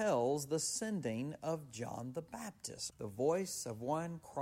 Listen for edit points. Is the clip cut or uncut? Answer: cut